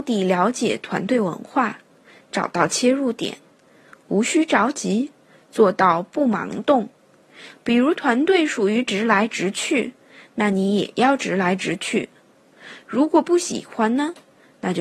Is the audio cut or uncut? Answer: uncut